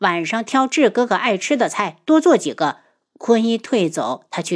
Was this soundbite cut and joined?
no; 0 cuts

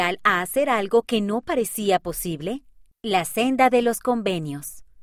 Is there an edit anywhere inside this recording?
yes; 1 cut; at 2.9 s

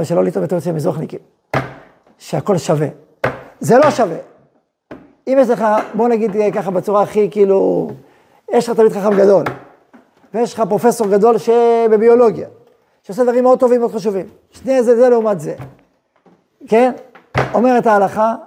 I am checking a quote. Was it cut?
no; 0 cuts

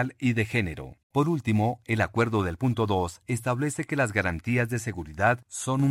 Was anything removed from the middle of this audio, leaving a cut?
yes; 1 cut; at 1.0 s

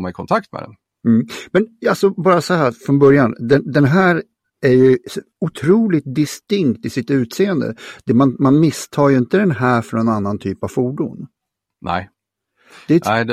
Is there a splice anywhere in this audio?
no; 0 cuts

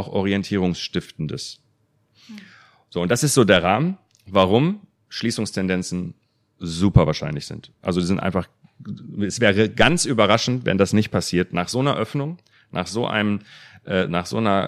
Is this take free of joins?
yes; 0 cuts

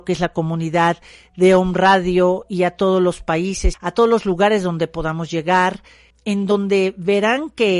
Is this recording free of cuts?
no; 2 cuts; at 3.7 s, 6.1 s

